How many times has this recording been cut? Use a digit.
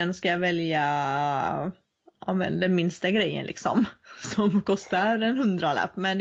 0